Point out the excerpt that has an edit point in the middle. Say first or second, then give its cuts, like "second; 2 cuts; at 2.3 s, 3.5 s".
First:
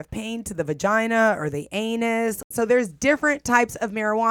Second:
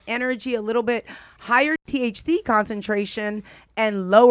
first; 1 cut; at 2.5 s